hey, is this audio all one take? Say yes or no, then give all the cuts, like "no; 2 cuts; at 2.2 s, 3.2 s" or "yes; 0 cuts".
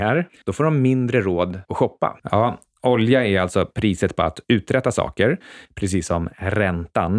no; 1 cut; at 2.2 s